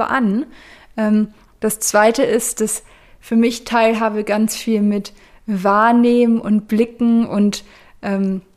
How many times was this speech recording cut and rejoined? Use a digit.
0